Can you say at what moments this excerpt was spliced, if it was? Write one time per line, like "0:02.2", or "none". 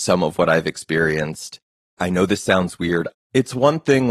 0:03.1